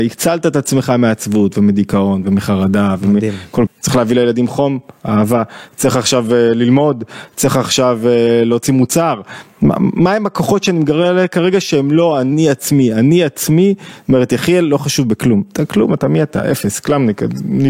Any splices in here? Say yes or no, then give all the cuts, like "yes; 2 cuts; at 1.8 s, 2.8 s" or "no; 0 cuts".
yes; 1 cut; at 3.7 s